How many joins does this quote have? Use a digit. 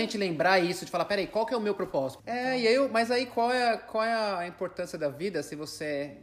1